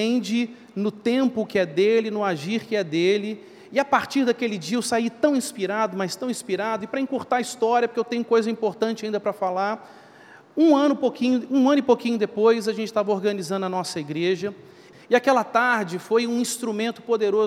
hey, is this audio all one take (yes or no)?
no